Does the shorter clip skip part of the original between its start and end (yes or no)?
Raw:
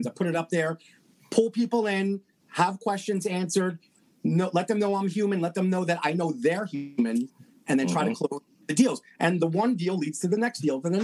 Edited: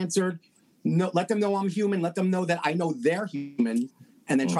no